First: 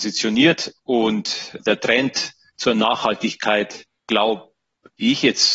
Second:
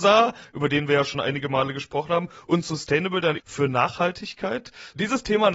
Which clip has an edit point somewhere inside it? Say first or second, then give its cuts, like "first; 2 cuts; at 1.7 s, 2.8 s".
second; 1 cut; at 3.4 s